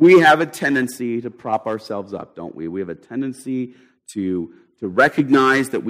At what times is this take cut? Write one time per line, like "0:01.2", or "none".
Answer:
none